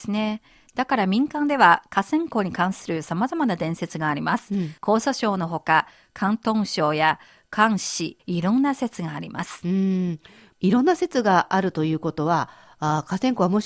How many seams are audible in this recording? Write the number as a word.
two